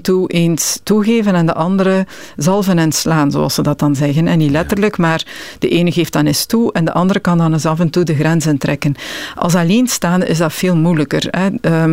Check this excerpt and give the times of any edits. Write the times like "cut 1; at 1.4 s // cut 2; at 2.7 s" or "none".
none